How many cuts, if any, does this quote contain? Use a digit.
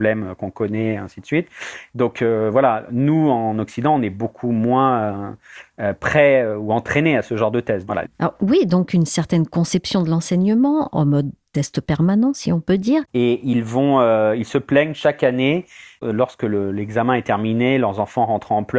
1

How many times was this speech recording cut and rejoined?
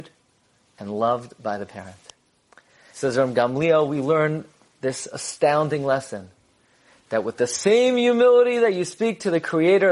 1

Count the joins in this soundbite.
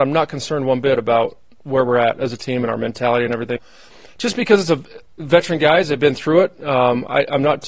1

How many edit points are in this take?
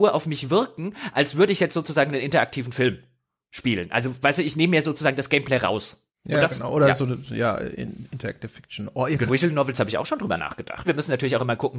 2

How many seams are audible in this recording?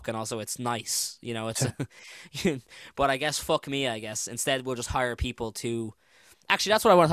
0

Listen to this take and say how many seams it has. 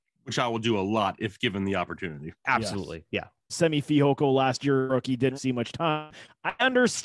2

